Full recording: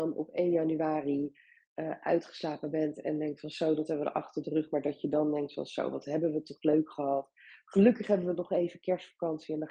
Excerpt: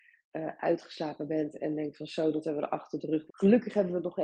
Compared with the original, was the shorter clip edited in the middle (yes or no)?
yes